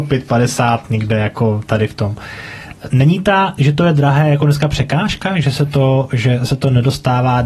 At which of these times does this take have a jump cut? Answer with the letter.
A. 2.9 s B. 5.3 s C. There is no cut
A